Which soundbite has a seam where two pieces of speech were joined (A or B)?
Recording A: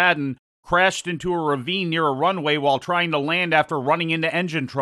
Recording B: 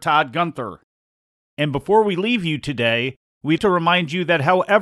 B